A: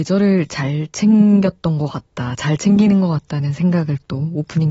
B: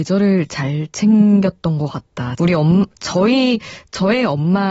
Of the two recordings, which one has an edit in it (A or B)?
B